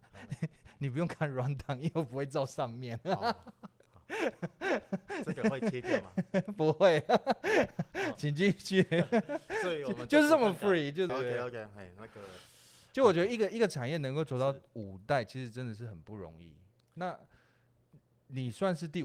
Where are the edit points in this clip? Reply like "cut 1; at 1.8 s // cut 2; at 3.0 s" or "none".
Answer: cut 1; at 11.1 s